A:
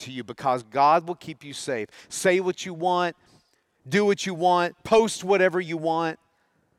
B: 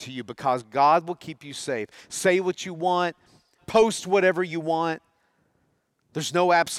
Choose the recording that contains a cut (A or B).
B